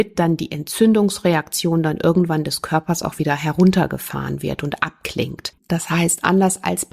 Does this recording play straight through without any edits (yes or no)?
no